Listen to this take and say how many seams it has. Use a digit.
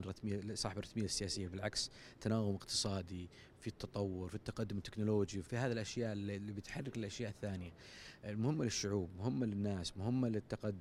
1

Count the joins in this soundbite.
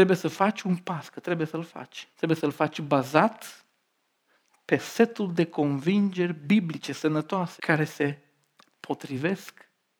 2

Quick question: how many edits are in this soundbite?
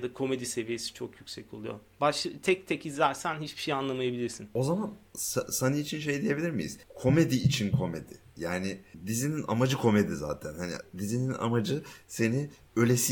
0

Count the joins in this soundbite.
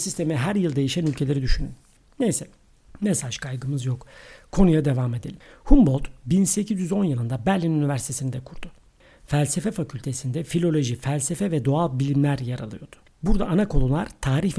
1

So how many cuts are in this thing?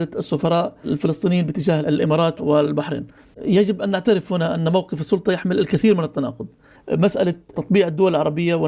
2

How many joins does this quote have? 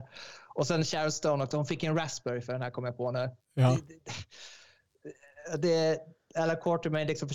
1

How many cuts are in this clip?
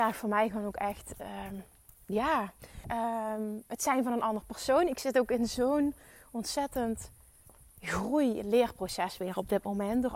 1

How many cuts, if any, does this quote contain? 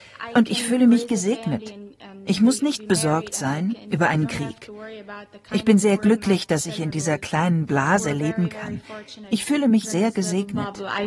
1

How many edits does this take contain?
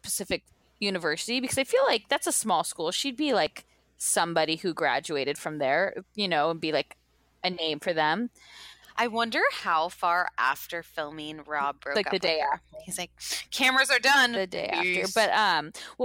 1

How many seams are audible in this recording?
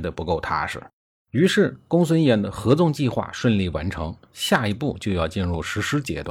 1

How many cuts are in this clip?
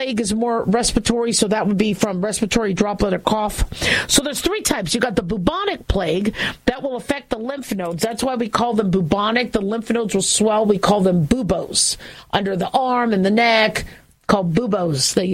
0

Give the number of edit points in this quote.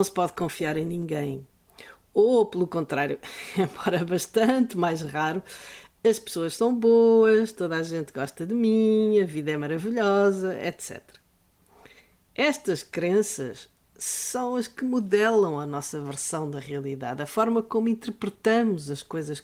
0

